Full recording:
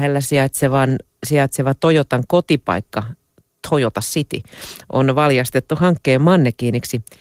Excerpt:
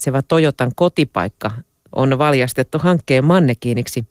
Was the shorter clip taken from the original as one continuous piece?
no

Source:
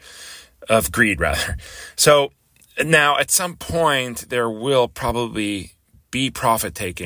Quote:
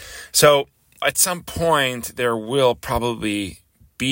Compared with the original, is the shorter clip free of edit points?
no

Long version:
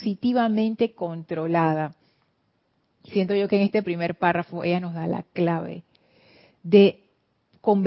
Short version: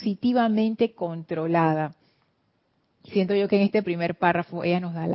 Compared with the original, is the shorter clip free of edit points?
yes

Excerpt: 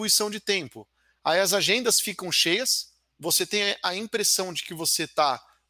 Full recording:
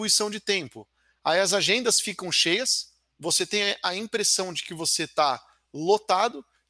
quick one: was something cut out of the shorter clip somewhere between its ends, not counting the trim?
no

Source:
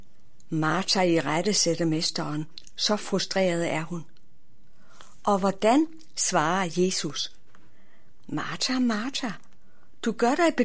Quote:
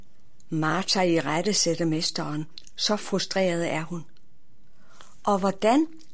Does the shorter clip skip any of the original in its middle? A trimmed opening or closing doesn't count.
no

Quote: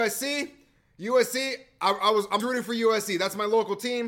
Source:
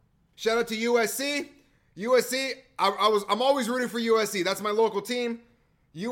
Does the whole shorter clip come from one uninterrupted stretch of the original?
no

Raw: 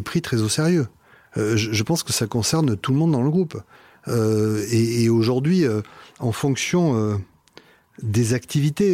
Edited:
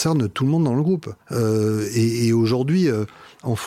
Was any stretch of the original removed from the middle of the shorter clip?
yes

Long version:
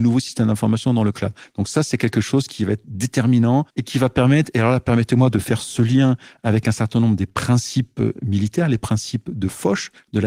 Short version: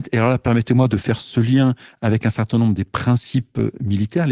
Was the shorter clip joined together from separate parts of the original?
no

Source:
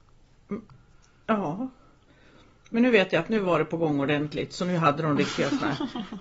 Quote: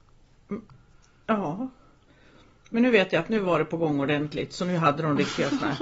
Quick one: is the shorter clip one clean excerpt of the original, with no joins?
yes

